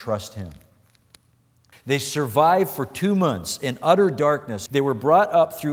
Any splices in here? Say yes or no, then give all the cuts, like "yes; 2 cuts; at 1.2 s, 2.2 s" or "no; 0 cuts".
yes; 2 cuts; at 1.7 s, 4.7 s